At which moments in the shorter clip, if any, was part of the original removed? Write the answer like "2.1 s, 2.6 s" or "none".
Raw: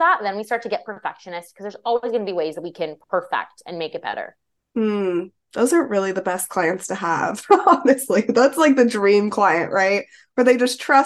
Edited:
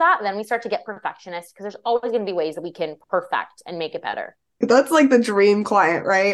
4.6 s